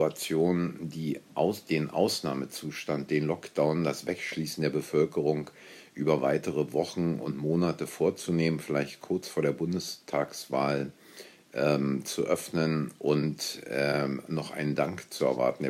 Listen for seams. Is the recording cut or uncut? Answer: uncut